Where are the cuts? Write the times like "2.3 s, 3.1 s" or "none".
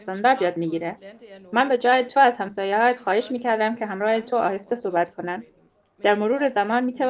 none